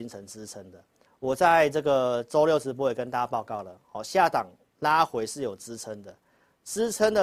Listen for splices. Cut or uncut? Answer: cut